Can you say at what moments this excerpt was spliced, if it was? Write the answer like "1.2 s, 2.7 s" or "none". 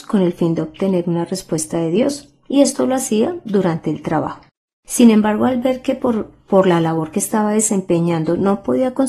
none